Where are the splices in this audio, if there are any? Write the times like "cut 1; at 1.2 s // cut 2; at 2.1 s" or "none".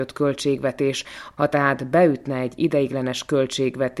cut 1; at 1.3 s

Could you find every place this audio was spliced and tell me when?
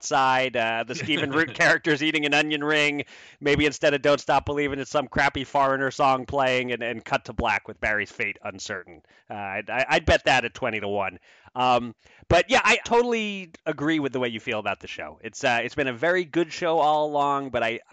cut 1; at 12.8 s

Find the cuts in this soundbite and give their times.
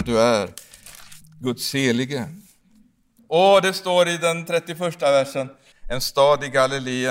cut 1; at 3.2 s // cut 2; at 5.7 s

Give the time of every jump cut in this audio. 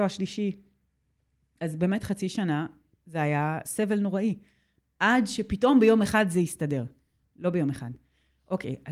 cut 1; at 1.6 s

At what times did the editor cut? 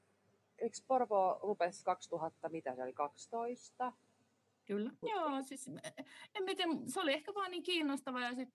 cut 1; at 5.0 s

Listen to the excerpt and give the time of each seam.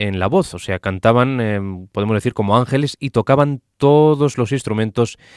none

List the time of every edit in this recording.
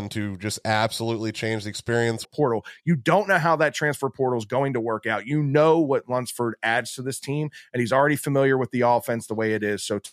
cut 1; at 2.2 s

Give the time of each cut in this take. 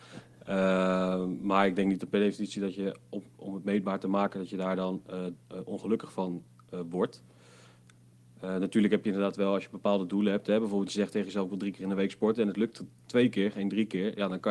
none

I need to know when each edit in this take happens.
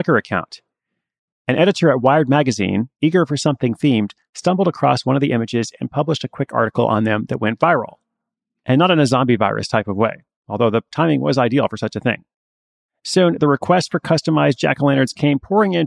none

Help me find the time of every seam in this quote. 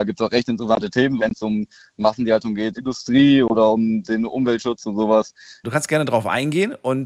cut 1; at 1.2 s // cut 2; at 2.8 s // cut 3; at 5.6 s

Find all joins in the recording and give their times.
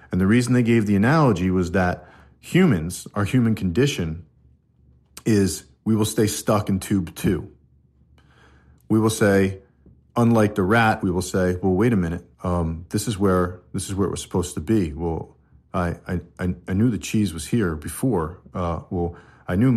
cut 1; at 11.0 s // cut 2; at 12.3 s

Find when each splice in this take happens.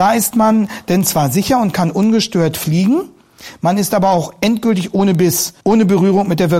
cut 1; at 5.6 s

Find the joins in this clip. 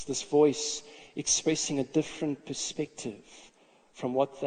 none

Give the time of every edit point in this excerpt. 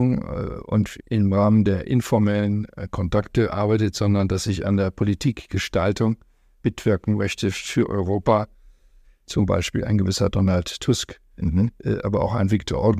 cut 1; at 9.0 s

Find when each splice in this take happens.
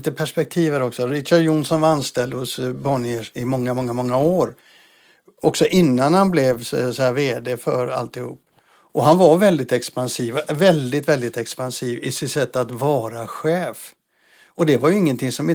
none

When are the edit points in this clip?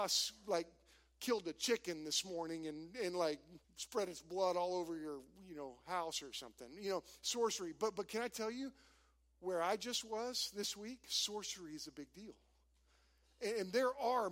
cut 1; at 3.6 s

